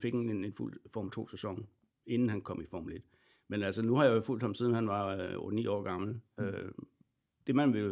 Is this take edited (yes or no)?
yes